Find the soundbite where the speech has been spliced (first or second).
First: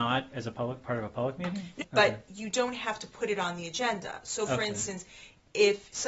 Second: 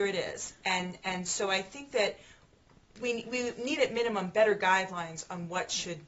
first